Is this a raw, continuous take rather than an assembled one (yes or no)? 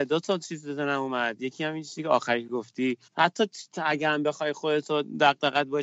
no